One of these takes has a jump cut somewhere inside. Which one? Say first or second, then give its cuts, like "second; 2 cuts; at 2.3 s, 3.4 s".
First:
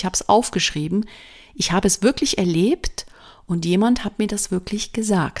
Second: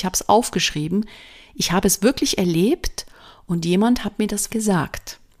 second; 1 cut; at 4.5 s